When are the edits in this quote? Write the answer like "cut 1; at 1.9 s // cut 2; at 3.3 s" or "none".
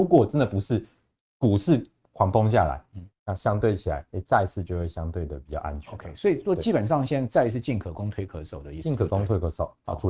none